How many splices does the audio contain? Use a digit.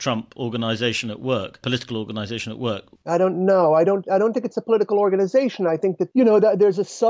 1